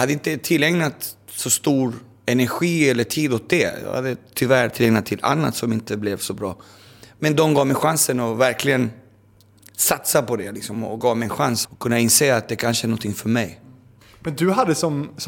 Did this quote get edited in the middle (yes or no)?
yes